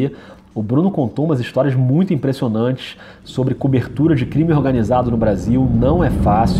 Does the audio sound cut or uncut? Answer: uncut